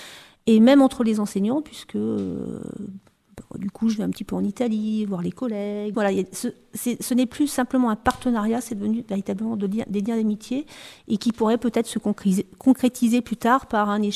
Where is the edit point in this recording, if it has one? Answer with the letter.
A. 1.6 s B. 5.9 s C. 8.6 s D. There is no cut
B